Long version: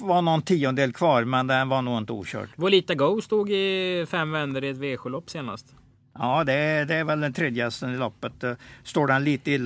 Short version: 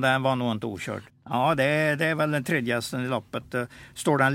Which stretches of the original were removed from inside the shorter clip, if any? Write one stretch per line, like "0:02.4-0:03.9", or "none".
0:02.6-0:06.0